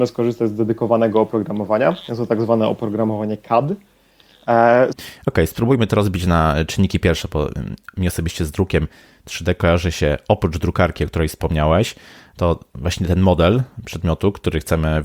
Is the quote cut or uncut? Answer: cut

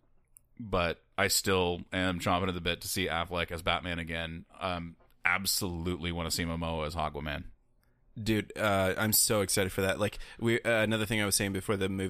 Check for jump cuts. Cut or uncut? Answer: uncut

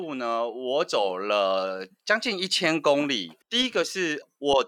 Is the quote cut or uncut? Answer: cut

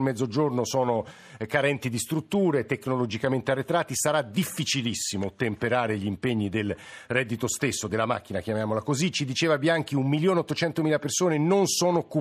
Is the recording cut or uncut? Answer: uncut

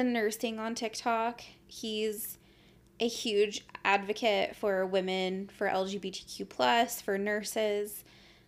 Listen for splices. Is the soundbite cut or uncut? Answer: uncut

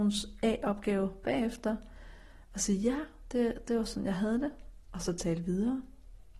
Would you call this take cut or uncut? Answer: uncut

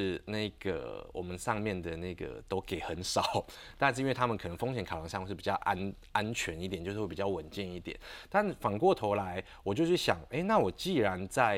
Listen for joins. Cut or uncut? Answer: uncut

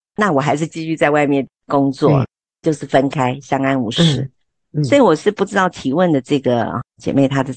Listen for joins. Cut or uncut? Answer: uncut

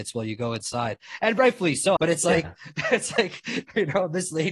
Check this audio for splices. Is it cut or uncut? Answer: cut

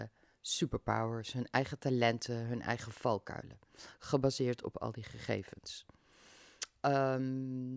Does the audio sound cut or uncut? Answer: uncut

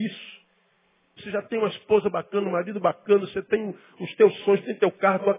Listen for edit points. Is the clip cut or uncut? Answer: cut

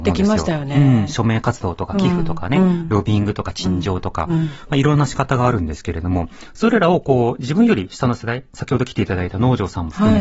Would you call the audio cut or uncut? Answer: uncut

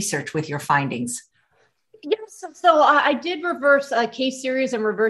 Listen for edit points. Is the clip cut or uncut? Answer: uncut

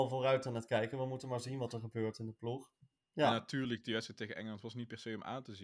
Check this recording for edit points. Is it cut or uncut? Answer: cut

